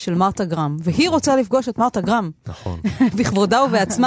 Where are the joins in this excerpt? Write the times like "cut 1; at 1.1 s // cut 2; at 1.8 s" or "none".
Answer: none

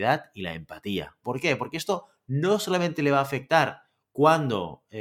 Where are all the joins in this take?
cut 1; at 1.2 s

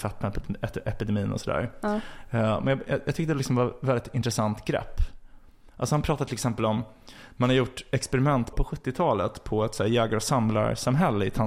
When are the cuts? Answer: cut 1; at 8.5 s

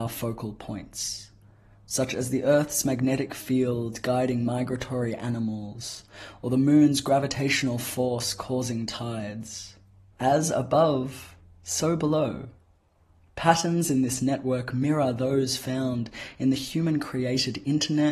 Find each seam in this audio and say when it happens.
cut 1; at 10.1 s

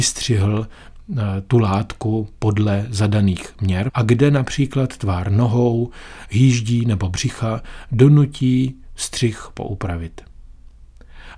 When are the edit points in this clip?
cut 1; at 3.9 s

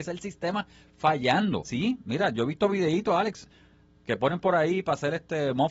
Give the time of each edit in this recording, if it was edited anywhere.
cut 1; at 1.6 s

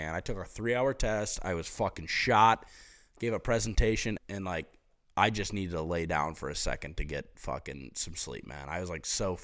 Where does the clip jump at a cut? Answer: cut 1; at 4.2 s

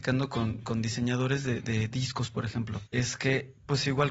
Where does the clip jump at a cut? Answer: cut 1; at 2.9 s

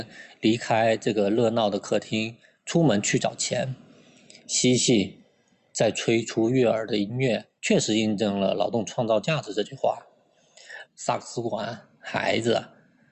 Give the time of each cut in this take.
cut 1; at 7.6 s // cut 2; at 10.9 s

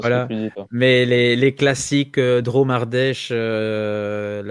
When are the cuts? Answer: none

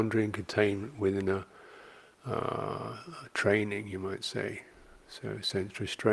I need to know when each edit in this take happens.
none

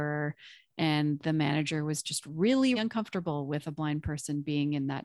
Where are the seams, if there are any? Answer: cut 1; at 2.8 s

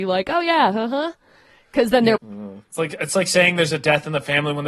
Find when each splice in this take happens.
cut 1; at 2.2 s

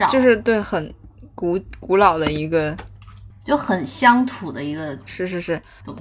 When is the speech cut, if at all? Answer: none

